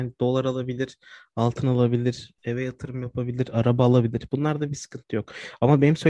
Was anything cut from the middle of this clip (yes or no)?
no